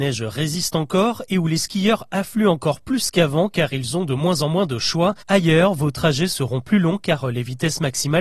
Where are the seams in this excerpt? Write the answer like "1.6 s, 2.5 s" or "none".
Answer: 5.2 s